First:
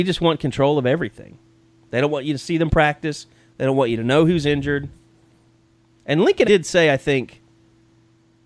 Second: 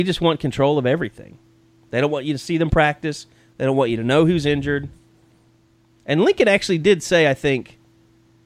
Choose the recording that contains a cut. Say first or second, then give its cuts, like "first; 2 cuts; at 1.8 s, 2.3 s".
first; 1 cut; at 6.4 s